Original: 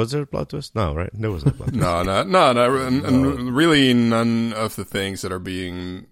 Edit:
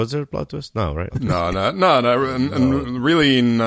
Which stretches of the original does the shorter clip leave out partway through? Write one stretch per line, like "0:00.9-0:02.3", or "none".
0:01.1-0:01.6